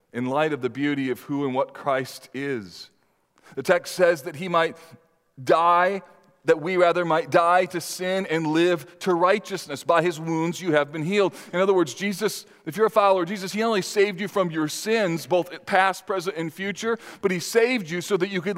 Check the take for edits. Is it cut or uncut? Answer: uncut